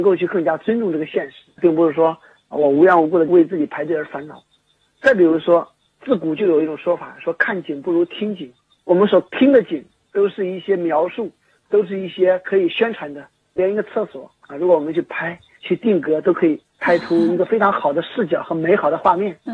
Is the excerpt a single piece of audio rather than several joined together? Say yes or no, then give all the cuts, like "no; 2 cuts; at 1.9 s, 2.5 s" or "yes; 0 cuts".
yes; 0 cuts